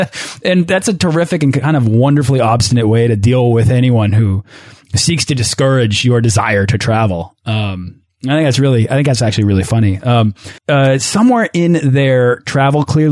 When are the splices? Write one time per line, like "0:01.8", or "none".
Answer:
0:10.6